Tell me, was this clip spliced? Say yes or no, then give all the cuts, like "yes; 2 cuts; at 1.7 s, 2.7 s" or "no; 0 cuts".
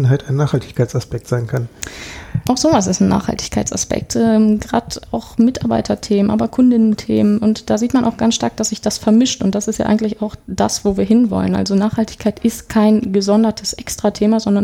no; 0 cuts